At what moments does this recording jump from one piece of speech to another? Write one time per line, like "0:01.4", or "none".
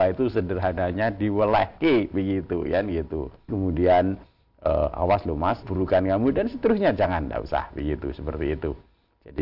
0:03.5
0:05.6